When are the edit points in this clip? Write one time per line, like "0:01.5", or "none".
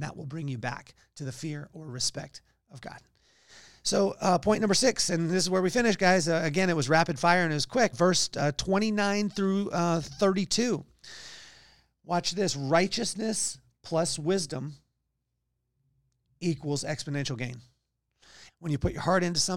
0:07.9
0:18.5